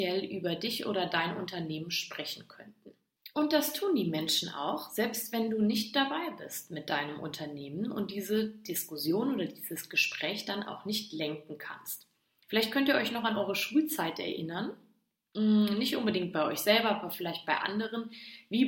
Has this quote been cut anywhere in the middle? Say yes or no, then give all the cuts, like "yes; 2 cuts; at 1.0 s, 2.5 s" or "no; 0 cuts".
no; 0 cuts